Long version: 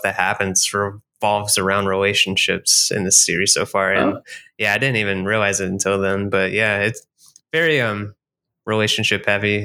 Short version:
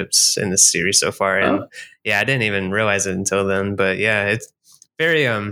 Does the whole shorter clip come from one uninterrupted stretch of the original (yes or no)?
yes